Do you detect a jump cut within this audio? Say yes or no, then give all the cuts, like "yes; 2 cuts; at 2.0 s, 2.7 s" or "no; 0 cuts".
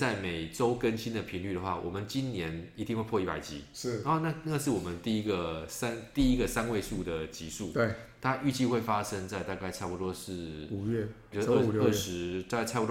yes; 1 cut; at 11.3 s